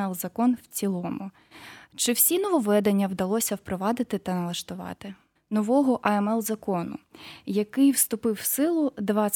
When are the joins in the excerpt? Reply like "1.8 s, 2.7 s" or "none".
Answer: 5.4 s